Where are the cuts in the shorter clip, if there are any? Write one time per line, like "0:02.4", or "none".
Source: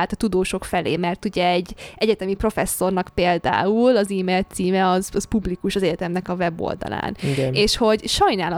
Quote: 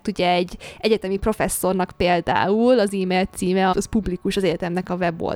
0:03.7